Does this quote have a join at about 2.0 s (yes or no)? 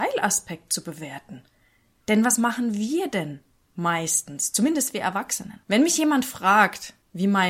yes